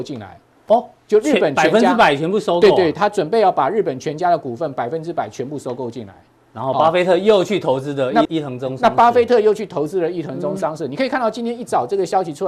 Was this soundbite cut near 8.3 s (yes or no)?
yes